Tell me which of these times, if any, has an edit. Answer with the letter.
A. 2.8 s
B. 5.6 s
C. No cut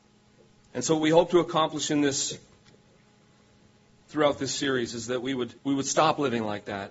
B